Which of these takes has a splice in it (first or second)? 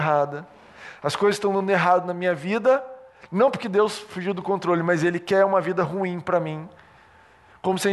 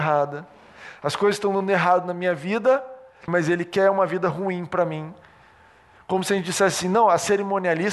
second